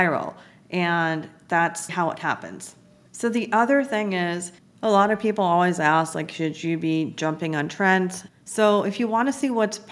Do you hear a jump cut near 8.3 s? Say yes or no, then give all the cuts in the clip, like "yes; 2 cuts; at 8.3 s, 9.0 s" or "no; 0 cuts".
yes; 2 cuts; at 1.9 s, 8.3 s